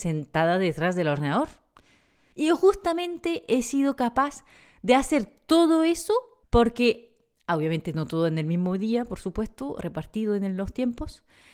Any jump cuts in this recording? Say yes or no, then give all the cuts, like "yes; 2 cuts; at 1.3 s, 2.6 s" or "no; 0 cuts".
yes; 2 cuts; at 2.3 s, 6.4 s